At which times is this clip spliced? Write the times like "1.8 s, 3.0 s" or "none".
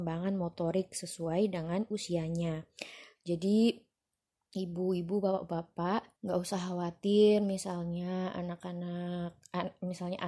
3.1 s, 6.1 s